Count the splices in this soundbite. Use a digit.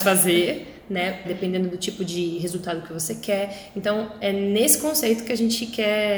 1